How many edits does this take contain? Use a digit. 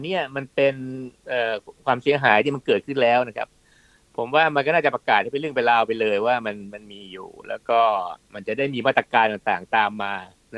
0